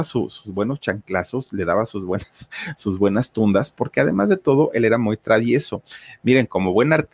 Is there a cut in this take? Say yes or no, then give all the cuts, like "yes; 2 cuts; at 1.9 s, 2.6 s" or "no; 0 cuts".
no; 0 cuts